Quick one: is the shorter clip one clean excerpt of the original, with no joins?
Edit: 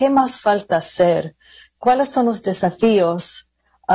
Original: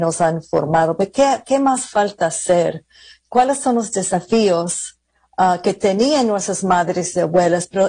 yes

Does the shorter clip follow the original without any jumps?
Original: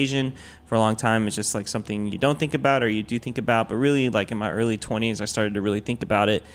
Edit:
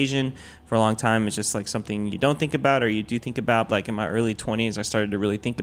no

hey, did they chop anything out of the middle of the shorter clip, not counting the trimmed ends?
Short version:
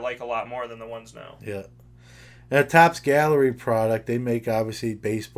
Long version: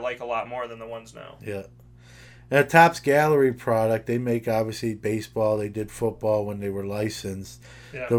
no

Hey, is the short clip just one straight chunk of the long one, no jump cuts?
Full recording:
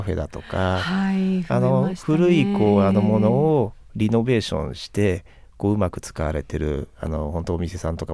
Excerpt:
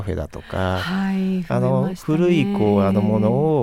yes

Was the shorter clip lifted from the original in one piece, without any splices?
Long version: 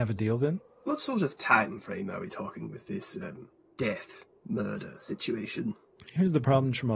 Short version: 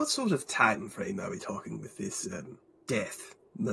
yes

